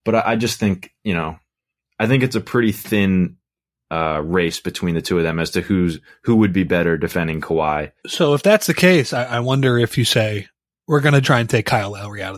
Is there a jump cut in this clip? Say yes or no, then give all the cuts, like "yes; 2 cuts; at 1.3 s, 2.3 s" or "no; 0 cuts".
yes; 2 cuts; at 8.0 s, 11.2 s